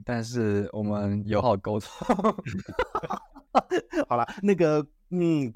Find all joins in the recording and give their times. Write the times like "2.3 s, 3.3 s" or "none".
1.4 s